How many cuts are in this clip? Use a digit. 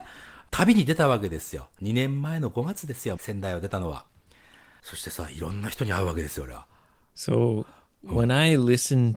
1